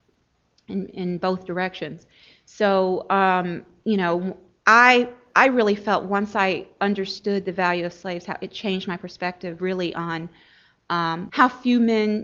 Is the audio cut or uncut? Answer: cut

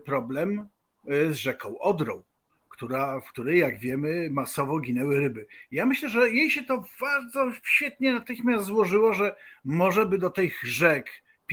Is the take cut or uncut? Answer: uncut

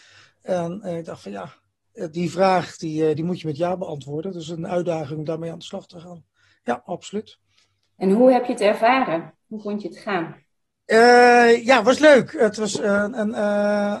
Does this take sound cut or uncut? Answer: uncut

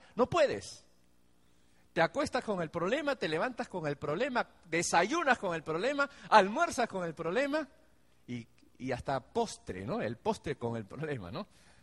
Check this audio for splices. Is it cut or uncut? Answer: uncut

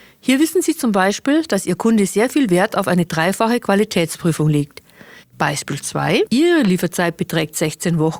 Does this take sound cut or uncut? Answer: cut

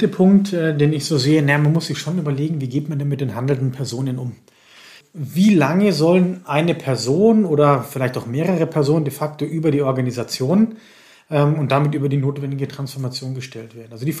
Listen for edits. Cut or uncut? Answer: uncut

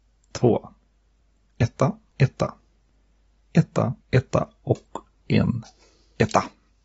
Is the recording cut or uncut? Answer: cut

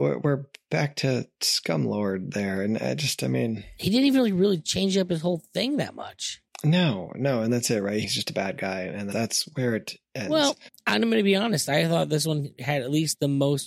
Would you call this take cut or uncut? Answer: cut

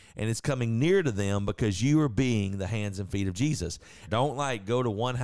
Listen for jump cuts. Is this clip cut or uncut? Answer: cut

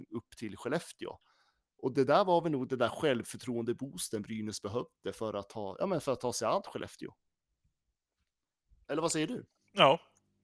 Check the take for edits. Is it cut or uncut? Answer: uncut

